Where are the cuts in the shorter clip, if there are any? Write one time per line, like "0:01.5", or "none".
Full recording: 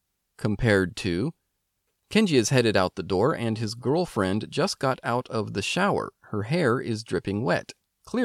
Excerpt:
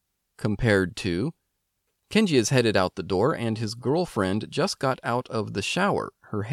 none